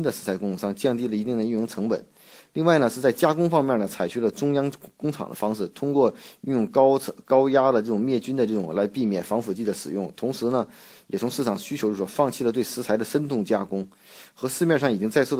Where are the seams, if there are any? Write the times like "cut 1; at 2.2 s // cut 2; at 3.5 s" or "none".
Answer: none